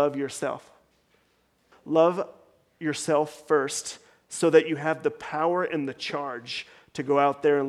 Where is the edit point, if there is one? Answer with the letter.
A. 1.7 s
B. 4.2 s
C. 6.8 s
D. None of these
A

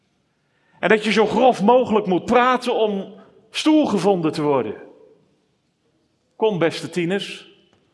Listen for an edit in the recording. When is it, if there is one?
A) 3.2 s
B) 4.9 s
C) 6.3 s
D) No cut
D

